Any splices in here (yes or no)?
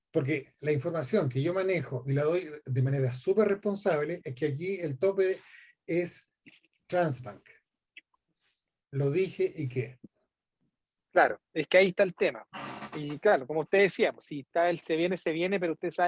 no